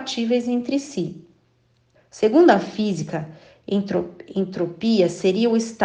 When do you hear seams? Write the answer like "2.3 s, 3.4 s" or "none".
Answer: 1.9 s